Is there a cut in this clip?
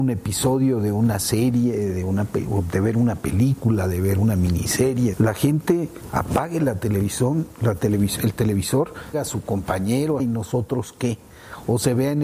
yes; 3 cuts; at 5.1 s, 9.1 s, 10.2 s

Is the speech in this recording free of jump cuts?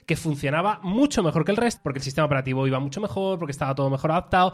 no; 1 cut; at 1.8 s

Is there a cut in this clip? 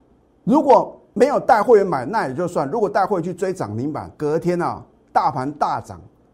yes; 1 cut; at 4.1 s

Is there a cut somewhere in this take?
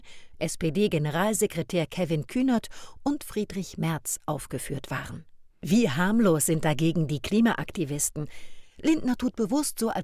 yes; 2 cuts; at 5.5 s, 8.6 s

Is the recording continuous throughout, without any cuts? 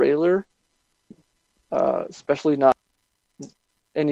yes; 0 cuts

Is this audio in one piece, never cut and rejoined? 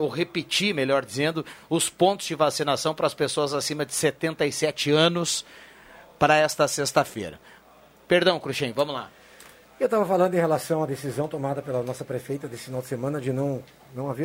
yes; 0 cuts

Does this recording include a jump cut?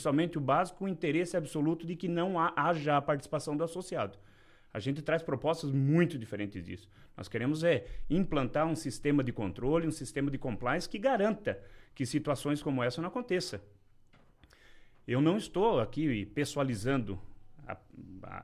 no; 0 cuts

